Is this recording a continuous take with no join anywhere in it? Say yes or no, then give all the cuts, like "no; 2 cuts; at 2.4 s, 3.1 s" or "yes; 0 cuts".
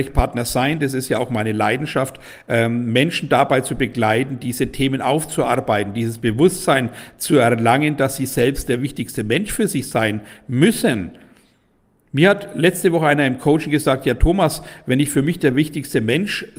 yes; 0 cuts